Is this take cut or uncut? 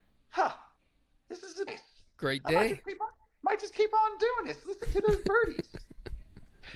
cut